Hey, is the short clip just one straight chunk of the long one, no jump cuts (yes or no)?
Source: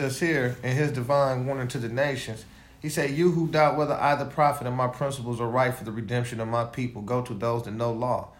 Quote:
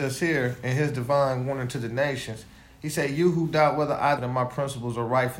no